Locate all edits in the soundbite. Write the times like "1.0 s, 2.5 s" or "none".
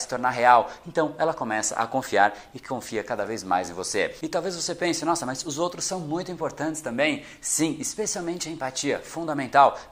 none